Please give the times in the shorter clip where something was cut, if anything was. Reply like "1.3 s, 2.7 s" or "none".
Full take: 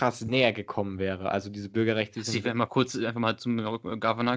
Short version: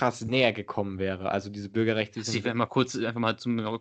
none